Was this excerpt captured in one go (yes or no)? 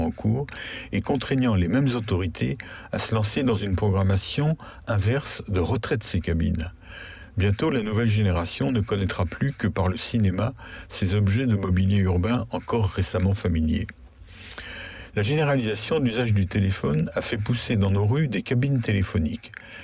no